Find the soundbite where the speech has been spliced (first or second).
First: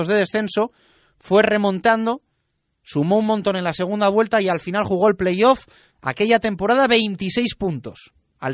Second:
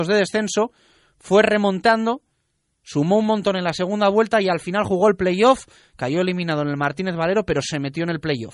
first